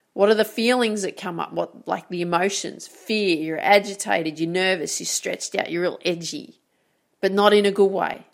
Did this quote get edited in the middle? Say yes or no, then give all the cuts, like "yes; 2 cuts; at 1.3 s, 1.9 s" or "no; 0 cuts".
no; 0 cuts